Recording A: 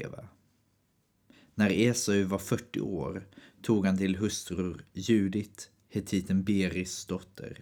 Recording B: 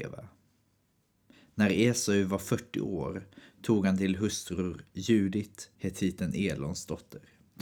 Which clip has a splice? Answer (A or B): B